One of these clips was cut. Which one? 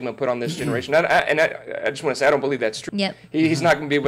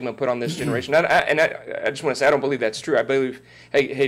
first; 1 cut; at 2.9 s

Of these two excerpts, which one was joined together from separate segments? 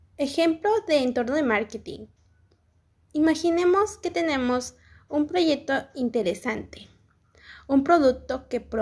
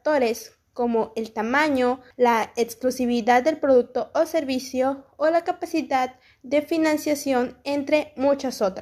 second; 1 cut; at 2.1 s

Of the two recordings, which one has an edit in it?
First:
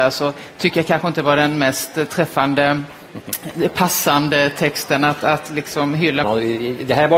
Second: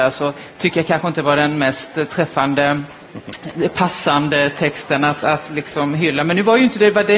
first; 1 cut; at 6.2 s

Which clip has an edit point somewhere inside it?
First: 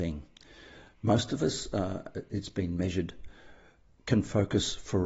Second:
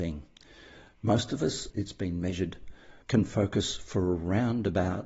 second; 2 cuts; at 1.7 s, 3.0 s

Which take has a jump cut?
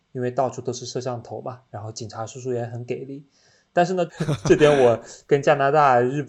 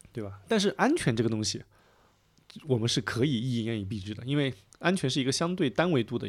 first; 1 cut; at 4.1 s

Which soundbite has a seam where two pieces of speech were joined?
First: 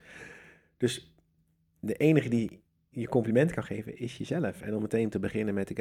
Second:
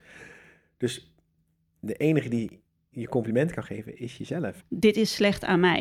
second; 1 cut; at 4.6 s

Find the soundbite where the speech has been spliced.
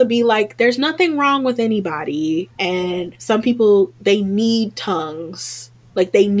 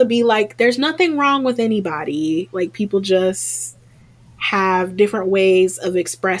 first; 1 cut; at 2.5 s

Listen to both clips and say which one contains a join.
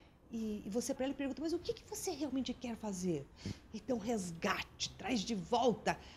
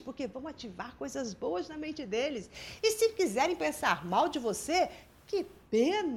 first; 2 cuts; at 1.0 s, 3.7 s

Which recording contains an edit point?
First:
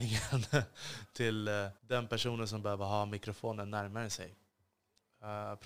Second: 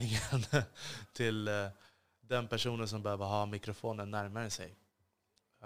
first; 1 cut; at 1.8 s

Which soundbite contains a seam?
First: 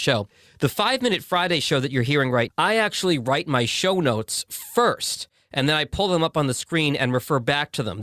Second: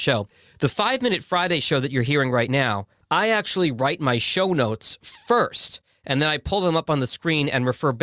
first; 1 cut; at 2.5 s

